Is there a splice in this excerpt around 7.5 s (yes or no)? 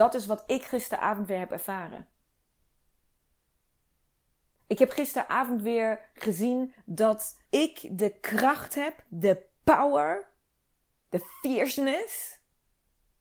yes